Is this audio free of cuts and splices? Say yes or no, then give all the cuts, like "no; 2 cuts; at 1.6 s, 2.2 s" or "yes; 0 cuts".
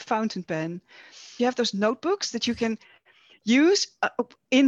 no; 1 cut; at 1.4 s